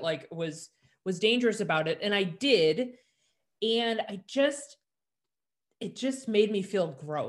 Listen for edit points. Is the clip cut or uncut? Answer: uncut